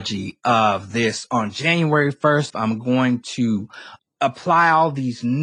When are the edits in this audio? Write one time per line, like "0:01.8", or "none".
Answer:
0:02.5
0:04.0